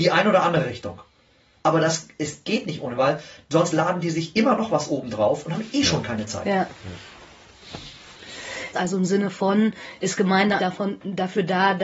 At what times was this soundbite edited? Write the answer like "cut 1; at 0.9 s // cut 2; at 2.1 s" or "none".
cut 1; at 8.7 s // cut 2; at 10.6 s